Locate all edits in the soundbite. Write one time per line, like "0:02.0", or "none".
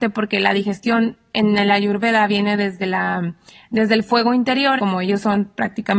0:04.8